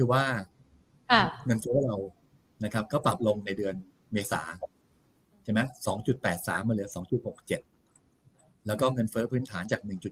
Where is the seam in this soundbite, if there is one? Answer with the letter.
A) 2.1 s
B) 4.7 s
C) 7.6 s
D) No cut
D